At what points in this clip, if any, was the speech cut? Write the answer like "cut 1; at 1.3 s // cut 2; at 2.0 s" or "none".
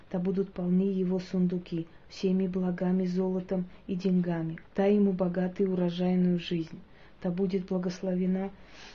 cut 1; at 4.6 s